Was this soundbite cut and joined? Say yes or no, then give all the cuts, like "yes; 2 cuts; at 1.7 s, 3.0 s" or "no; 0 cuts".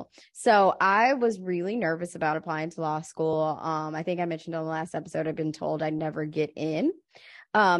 no; 0 cuts